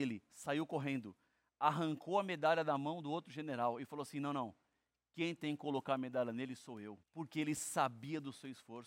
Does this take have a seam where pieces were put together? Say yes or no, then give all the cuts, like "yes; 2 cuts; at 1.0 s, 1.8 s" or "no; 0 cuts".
yes; 1 cut; at 7.0 s